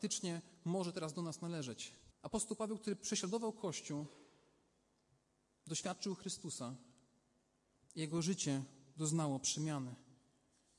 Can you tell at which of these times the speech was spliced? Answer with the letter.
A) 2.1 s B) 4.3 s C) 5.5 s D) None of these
A